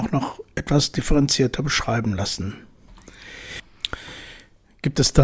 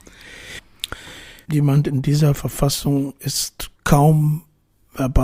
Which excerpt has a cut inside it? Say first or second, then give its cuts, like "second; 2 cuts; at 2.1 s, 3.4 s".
second; 2 cuts; at 1.4 s, 3.8 s